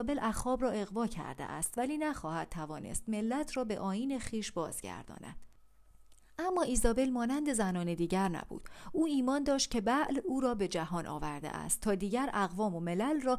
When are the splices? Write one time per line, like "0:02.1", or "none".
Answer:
none